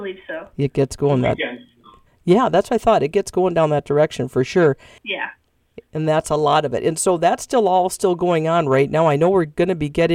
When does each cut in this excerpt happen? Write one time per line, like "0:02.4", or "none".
0:05.0